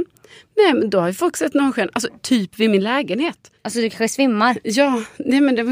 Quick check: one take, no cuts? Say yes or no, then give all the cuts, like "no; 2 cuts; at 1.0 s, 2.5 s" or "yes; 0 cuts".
no; 2 cuts; at 2.2 s, 3.6 s